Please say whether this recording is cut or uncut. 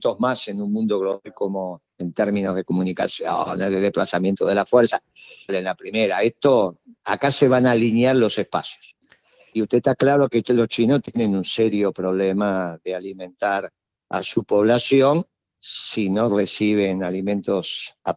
cut